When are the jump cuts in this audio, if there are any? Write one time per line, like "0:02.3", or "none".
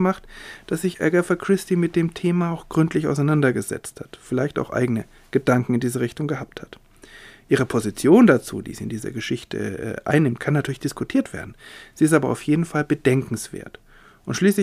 none